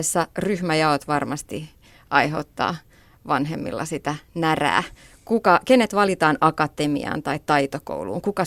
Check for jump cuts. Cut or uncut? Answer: uncut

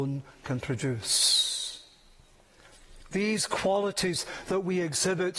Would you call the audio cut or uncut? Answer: uncut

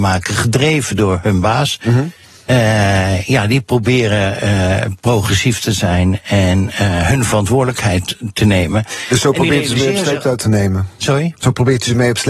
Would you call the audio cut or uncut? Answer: uncut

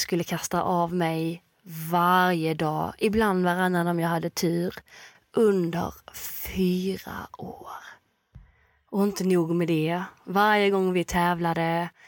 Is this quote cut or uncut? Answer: uncut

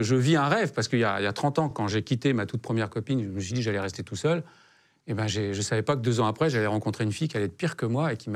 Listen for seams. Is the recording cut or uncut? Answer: uncut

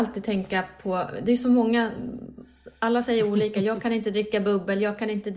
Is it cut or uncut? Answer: uncut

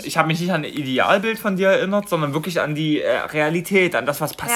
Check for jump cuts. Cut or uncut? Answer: uncut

